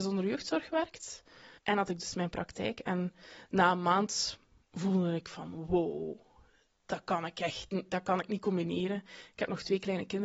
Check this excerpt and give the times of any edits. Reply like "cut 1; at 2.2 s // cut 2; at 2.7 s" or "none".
cut 1; at 1.6 s